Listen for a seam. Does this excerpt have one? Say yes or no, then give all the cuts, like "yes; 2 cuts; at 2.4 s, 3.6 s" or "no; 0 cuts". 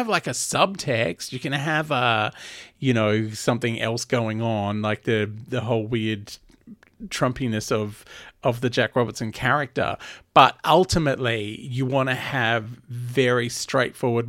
no; 0 cuts